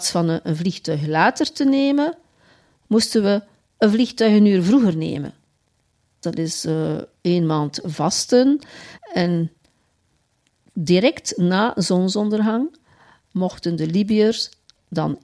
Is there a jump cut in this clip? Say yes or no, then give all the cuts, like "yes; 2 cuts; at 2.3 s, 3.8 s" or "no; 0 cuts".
yes; 2 cuts; at 6.2 s, 9.0 s